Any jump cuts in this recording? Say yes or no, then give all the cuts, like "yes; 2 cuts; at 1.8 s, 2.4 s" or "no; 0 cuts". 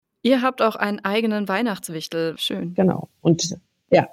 yes; 1 cut; at 2.4 s